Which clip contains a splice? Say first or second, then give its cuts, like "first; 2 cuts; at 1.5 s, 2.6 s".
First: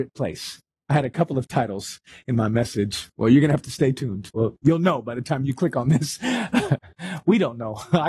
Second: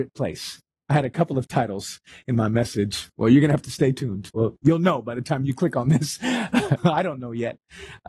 second; 1 cut; at 6.8 s